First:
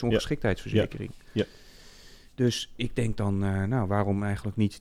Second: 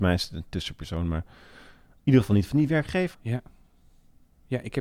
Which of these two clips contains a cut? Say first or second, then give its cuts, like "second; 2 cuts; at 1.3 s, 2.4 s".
second; 1 cut; at 3.1 s